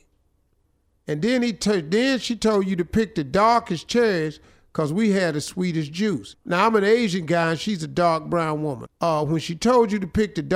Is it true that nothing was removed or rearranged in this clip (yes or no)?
no